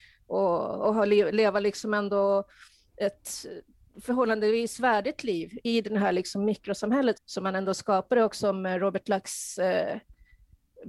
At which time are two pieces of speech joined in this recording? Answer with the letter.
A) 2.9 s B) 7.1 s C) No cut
B